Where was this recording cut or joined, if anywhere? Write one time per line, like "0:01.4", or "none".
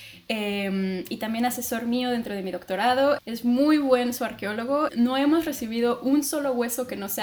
0:03.2
0:04.9

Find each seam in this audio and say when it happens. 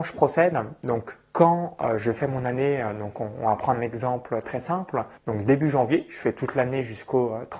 0:05.2

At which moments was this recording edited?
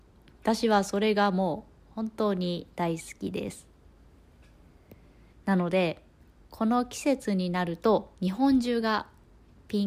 0:05.3
0:08.2

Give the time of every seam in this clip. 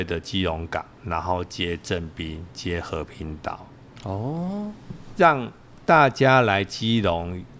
0:00.9

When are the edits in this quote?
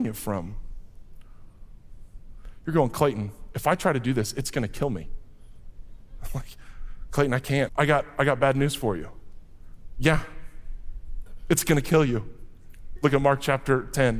0:07.7
0:13.0

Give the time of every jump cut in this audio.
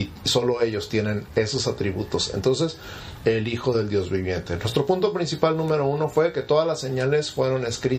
0:03.2

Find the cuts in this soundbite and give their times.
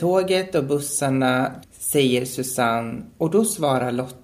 0:01.6

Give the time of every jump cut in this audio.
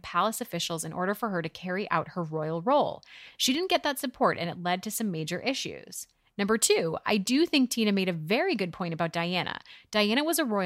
none

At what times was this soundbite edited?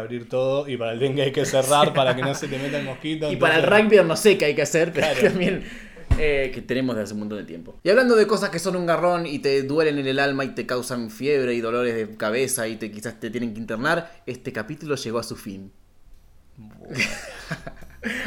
0:06.5

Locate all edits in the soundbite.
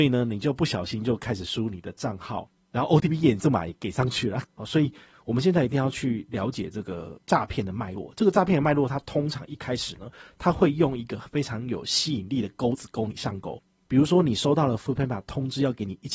0:02.6
0:04.4

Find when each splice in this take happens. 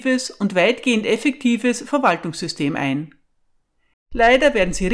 0:03.9

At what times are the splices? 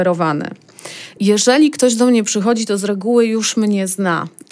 0:01.2

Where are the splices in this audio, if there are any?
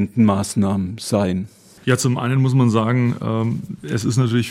0:01.8

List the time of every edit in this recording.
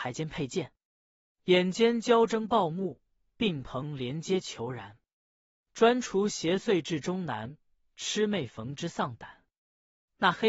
none

